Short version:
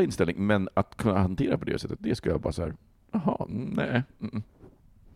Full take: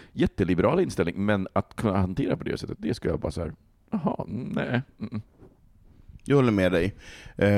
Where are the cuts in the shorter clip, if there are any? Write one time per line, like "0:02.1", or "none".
none